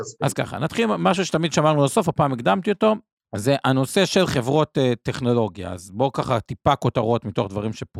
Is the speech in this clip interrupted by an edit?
no; 0 cuts

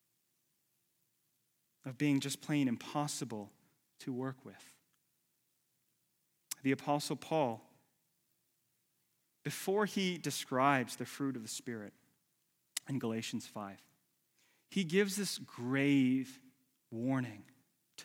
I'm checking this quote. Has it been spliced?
no; 0 cuts

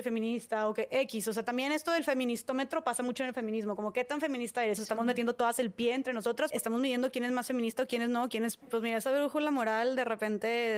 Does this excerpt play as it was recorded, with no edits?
no; 2 cuts; at 4.8 s, 8.6 s

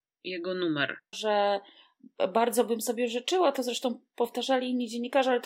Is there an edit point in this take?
yes; 1 cut; at 1.1 s

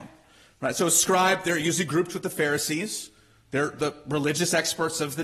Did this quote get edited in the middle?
no; 0 cuts

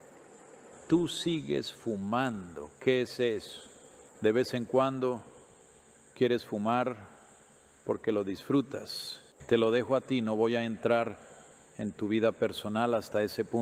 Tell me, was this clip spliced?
no; 0 cuts

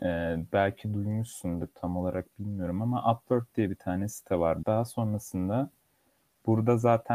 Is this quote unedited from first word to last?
no; 1 cut; at 4.6 s

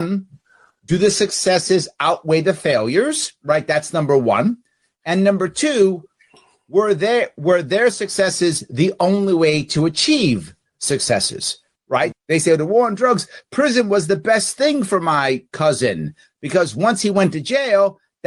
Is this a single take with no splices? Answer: no; 1 cut; at 12.1 s

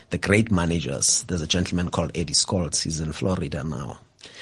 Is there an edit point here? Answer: no; 0 cuts

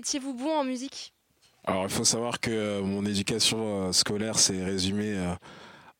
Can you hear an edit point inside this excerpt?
no; 0 cuts

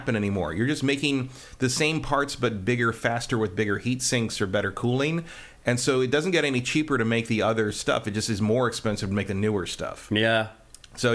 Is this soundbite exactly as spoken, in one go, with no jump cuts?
yes; 0 cuts

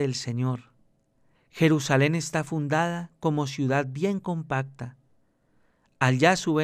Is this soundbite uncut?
no; 1 cut; at 1.3 s

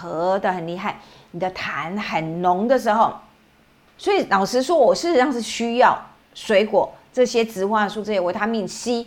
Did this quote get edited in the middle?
yes; 1 cut; at 4.0 s

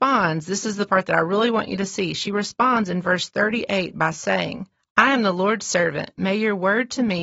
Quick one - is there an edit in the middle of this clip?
no; 0 cuts

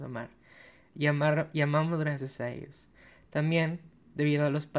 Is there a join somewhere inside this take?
no; 0 cuts

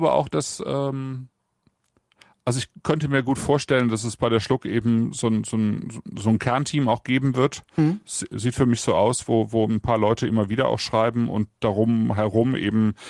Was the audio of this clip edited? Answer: no; 0 cuts

